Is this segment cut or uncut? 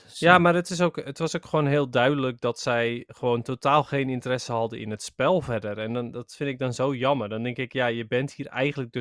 uncut